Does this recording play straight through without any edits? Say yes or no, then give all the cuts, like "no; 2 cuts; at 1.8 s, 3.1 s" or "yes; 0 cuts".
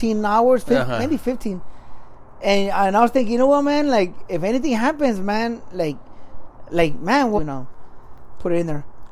no; 1 cut; at 7.4 s